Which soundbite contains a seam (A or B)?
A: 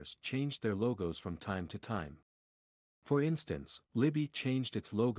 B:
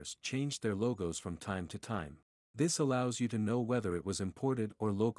B